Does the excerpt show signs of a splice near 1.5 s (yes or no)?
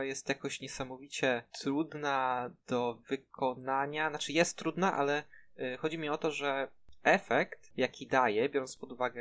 yes